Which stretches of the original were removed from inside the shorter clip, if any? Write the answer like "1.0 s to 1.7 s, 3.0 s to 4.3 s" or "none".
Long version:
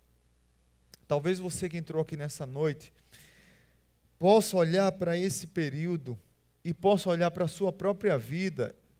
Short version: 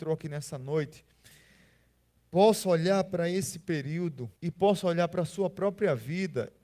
6.2 s to 6.6 s

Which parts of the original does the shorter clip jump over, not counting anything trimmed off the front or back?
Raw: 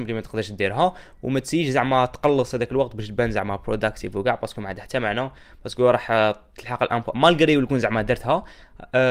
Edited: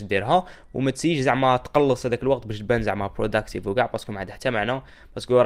none

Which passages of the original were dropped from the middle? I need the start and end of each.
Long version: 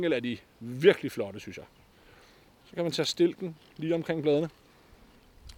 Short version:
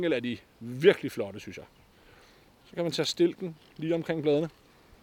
none

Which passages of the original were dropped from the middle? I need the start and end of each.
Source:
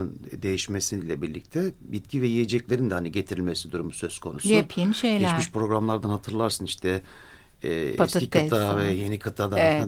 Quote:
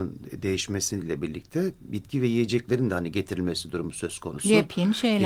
none

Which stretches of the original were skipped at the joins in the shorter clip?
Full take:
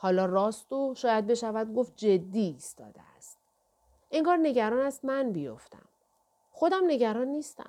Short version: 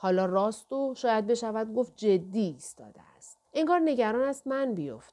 3.5 s to 4.0 s

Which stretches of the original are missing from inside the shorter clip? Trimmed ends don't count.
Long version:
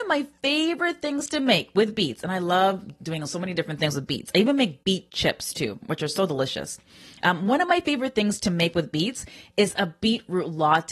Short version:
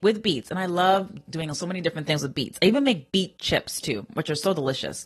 none

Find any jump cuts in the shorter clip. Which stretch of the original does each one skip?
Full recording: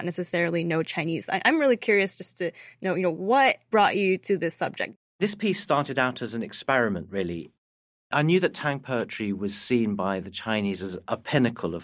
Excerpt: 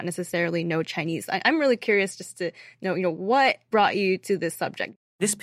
none

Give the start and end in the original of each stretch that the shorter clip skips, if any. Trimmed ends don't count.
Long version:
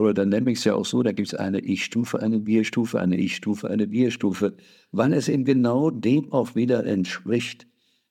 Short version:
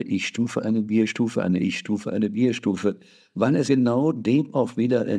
5.2 s to 5.5 s

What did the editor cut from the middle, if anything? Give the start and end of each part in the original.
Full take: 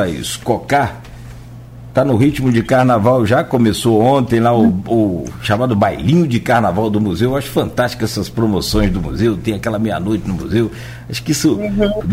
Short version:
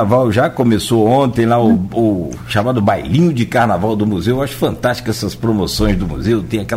none

